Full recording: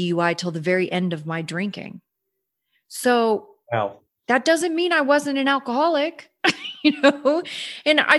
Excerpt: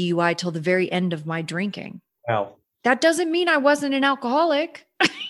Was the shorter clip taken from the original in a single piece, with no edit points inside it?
no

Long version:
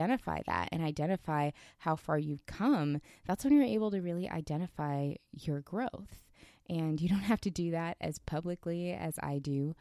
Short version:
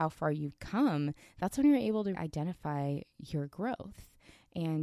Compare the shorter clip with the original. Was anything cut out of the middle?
yes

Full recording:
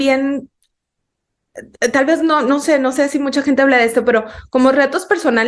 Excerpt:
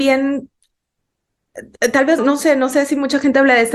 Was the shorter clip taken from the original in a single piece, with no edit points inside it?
no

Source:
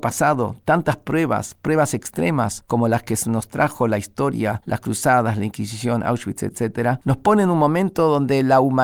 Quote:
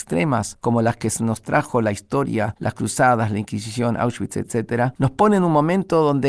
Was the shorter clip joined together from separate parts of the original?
no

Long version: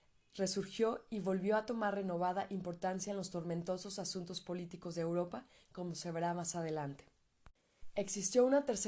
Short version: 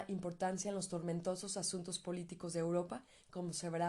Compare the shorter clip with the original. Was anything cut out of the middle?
no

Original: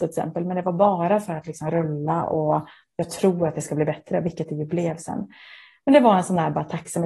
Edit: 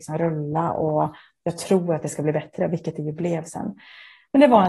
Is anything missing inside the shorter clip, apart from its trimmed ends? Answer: no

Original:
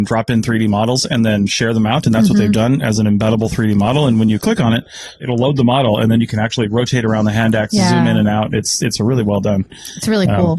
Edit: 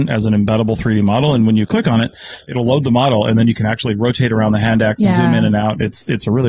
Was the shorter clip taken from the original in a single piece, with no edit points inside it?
yes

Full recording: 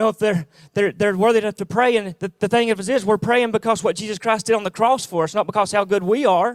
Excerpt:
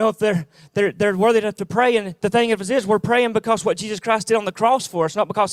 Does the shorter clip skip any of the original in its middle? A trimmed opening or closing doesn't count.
yes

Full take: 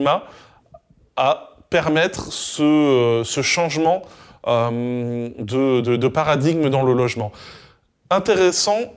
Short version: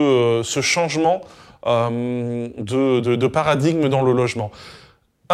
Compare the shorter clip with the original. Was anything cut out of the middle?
no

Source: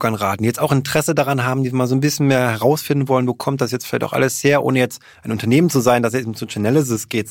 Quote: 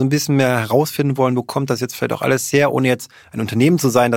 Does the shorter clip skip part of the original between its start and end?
no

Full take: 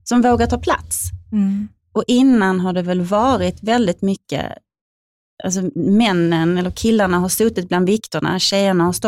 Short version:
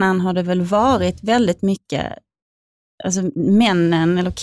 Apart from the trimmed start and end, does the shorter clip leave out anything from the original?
no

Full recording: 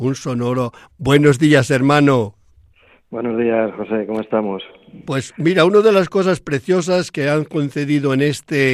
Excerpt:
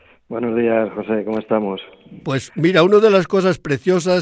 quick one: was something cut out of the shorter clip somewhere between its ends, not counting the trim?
no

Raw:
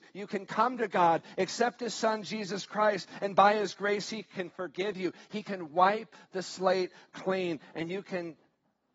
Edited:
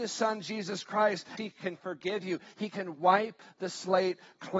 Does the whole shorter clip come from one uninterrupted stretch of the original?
no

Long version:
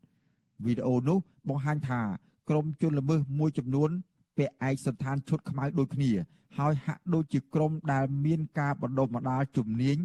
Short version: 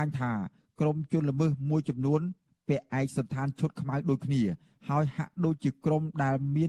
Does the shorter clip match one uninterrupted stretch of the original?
yes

